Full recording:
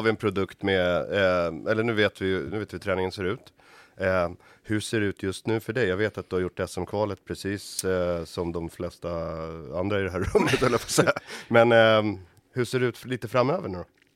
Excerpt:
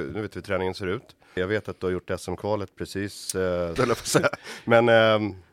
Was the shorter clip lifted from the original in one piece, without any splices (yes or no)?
no